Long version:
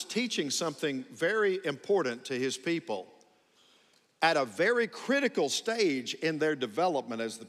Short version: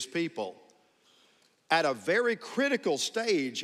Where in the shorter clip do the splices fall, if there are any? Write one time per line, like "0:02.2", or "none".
none